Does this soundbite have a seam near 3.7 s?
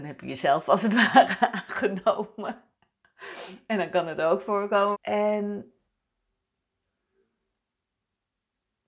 no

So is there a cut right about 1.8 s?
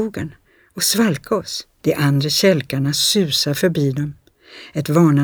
yes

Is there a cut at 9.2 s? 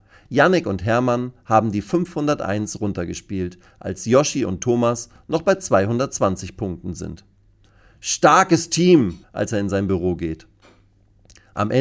yes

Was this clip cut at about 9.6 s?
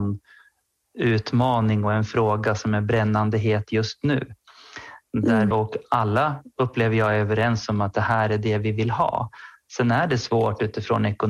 no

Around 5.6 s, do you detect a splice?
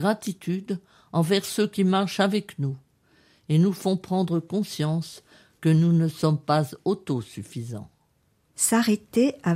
no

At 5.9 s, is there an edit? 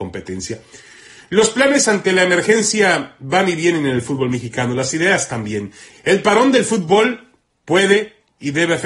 yes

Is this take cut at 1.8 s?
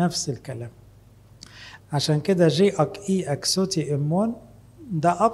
yes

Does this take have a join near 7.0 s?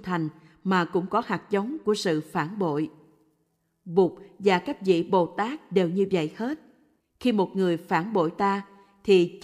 yes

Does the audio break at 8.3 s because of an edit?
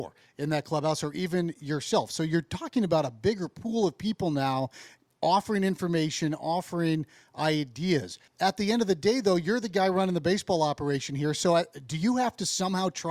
yes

